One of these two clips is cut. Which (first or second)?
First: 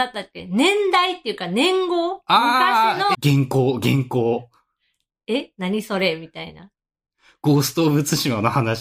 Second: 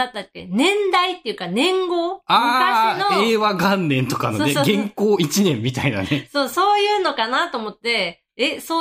first